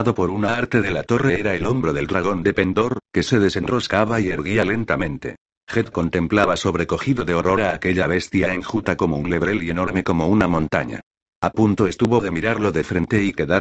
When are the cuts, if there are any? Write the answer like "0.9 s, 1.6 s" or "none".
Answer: 5.6 s, 11.3 s